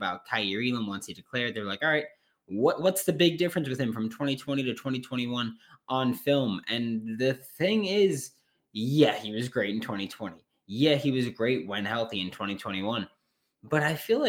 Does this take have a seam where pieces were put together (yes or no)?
no